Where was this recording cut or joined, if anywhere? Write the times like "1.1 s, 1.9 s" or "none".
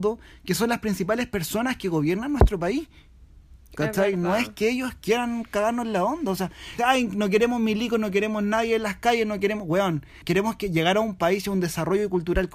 6.8 s, 10.2 s